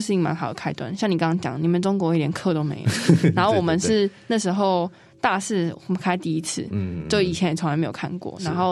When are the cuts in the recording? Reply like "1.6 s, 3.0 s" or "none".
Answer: none